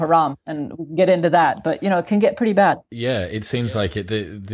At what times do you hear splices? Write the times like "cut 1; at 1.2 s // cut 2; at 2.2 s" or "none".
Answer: none